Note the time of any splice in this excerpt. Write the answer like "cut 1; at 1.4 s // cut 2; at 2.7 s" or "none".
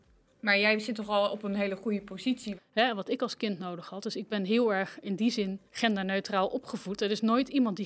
cut 1; at 2.5 s // cut 2; at 5.7 s